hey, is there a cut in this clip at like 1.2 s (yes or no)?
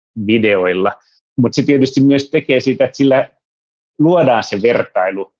yes